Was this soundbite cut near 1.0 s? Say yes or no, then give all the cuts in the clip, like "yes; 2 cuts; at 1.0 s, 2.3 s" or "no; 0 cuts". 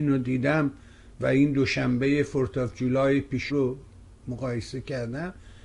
no; 1 cut; at 3.5 s